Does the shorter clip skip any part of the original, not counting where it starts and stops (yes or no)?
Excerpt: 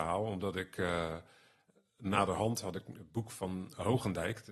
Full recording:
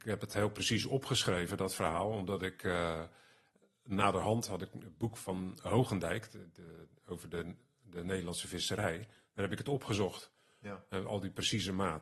no